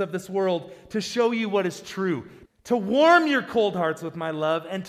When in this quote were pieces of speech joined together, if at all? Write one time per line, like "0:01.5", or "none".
0:02.5